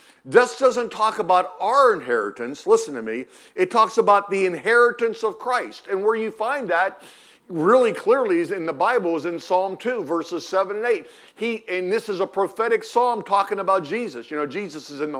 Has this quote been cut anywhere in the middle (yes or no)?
no